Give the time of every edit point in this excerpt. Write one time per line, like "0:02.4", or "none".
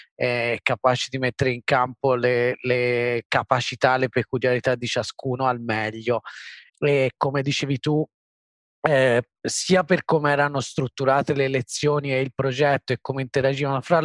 0:06.7